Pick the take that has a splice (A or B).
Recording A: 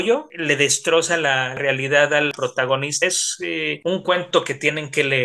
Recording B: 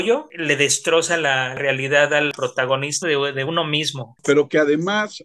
B